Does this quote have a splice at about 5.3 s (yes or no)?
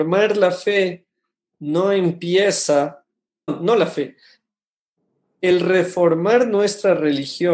no